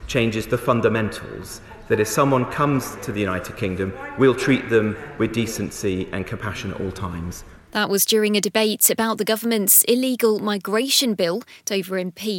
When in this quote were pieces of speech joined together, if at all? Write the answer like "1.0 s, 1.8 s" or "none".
none